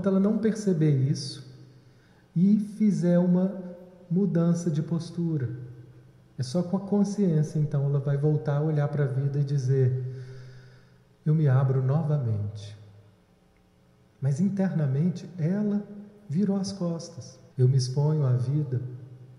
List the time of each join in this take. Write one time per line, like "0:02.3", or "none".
0:14.1
0:17.5

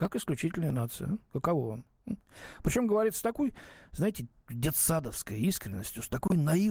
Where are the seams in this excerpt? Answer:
none

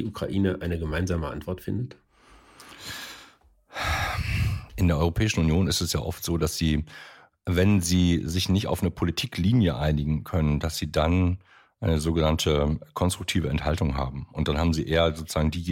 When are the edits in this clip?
none

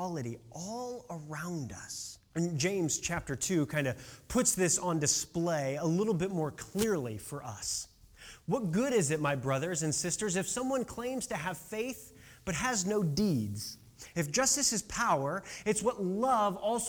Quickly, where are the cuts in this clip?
0:02.3
0:14.1

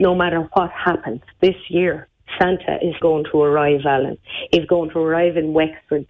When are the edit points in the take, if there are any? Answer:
0:03.0

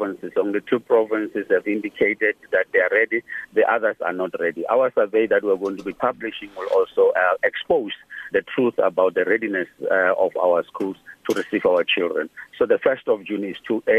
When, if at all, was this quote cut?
0:08.3

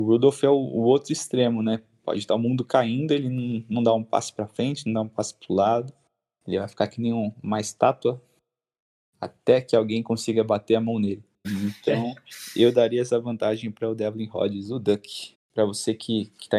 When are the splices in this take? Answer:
0:11.4
0:15.3

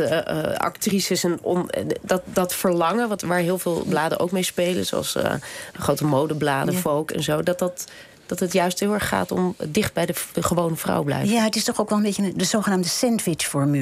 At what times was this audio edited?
none

